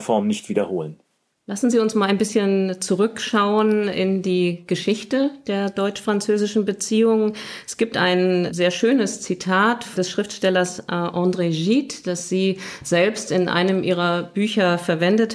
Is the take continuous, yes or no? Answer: yes